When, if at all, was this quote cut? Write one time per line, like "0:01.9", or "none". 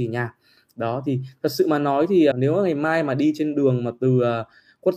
0:02.3